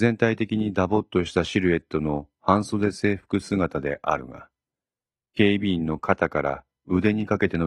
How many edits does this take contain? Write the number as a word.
zero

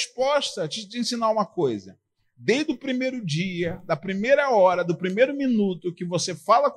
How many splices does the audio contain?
zero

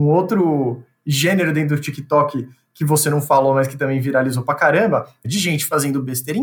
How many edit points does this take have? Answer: one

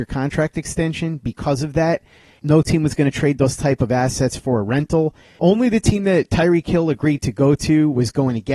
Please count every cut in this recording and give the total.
zero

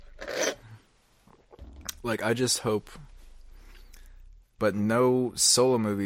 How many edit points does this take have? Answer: one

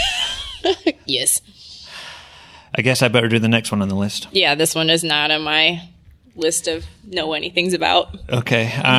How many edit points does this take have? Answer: zero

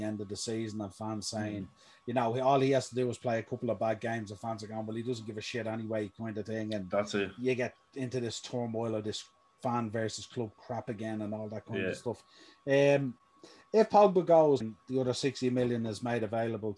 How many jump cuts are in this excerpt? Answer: one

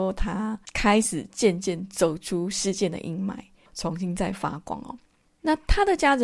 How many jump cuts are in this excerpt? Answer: one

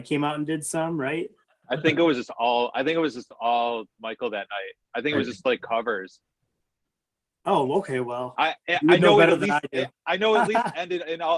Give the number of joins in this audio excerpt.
zero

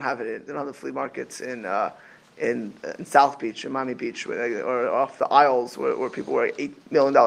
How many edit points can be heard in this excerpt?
zero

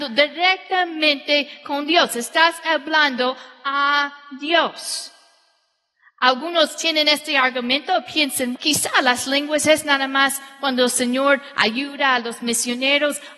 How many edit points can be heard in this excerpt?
one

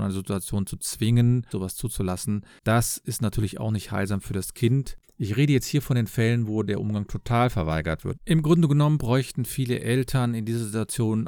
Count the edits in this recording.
three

